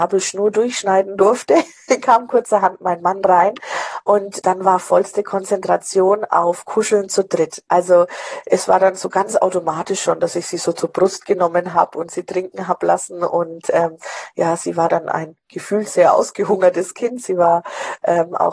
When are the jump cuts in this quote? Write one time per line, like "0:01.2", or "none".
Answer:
0:04.4